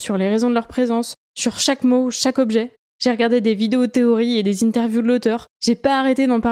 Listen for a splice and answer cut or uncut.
cut